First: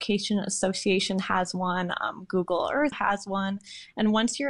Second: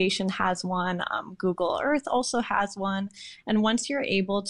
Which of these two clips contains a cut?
first; 1 cut; at 2.9 s

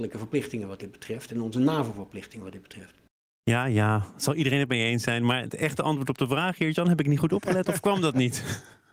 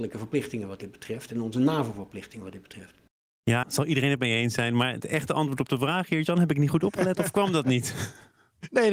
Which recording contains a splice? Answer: second; 1 cut; at 3.6 s

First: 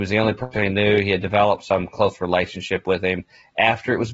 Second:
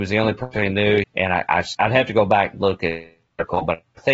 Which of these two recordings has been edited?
second; 1 cut; at 1.0 s

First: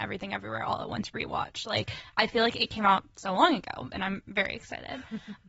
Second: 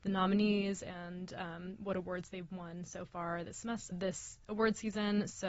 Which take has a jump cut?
second; 1 cut; at 3.9 s

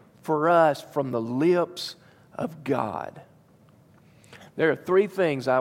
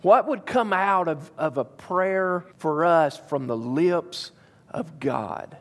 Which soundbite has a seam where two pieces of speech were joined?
second; 1 cut; at 2.5 s

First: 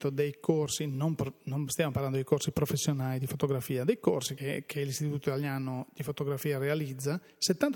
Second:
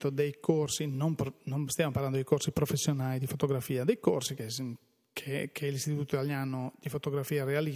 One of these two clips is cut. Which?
first; 1 cut; at 4.4 s

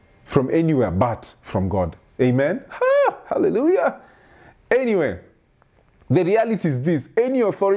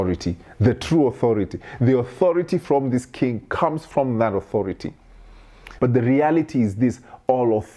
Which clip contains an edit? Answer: second; 1 cut; at 5.8 s

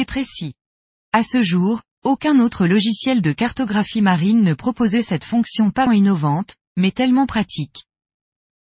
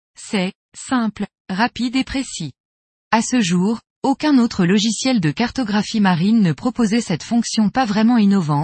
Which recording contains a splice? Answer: first; 1 cut; at 5.9 s

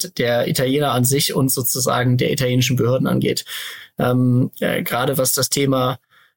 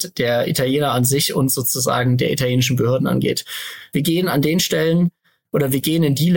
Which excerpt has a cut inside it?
second; 1 cut; at 3.9 s

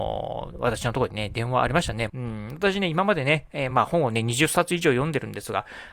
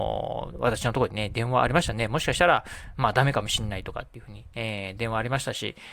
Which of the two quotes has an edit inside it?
first; 2 cuts; at 2.1 s, 3.7 s

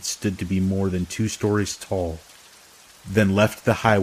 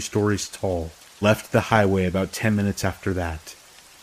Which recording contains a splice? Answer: second; 1 cut; at 1.2 s

